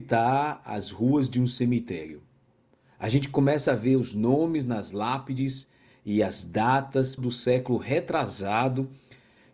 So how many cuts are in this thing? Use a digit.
1